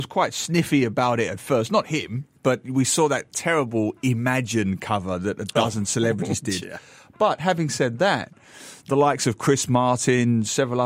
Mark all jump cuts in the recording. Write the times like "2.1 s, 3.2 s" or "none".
none